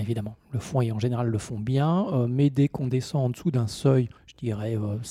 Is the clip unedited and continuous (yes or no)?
no